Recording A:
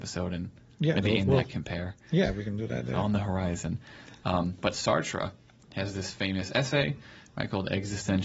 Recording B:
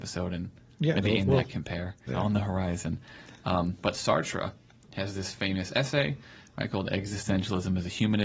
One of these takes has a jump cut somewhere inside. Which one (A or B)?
B